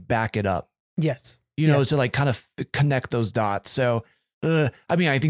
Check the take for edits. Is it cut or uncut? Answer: uncut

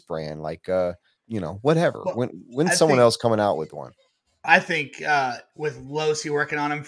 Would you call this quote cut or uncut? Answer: cut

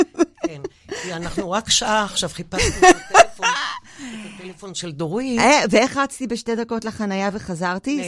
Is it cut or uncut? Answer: uncut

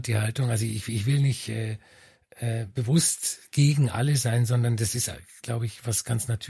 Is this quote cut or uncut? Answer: uncut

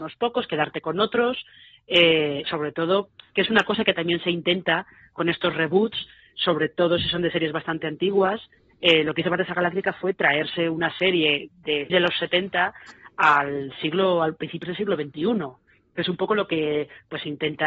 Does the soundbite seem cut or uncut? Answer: cut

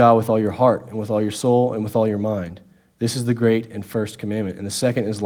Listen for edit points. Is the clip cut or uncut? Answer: uncut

